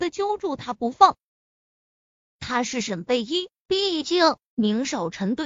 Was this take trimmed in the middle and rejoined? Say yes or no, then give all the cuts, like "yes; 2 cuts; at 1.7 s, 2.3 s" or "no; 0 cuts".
yes; 1 cut; at 3.6 s